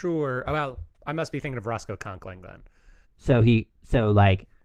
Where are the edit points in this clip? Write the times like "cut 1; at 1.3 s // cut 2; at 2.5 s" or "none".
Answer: cut 1; at 0.9 s // cut 2; at 3.0 s

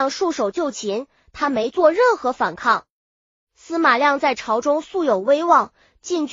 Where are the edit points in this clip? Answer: none

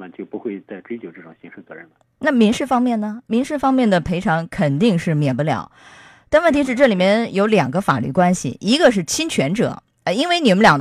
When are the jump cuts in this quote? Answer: none

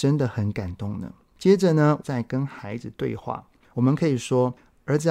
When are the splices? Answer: cut 1; at 2.0 s // cut 2; at 3.7 s

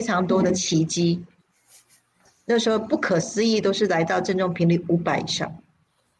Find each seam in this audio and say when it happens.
none

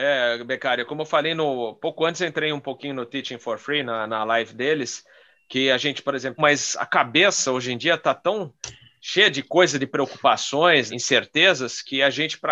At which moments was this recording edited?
cut 1; at 6.4 s // cut 2; at 10.9 s

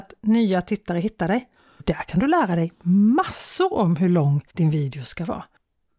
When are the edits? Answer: cut 1; at 1.8 s // cut 2; at 4.5 s

